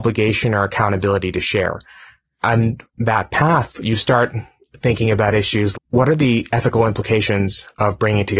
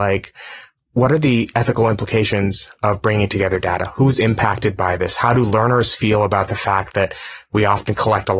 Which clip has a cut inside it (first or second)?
first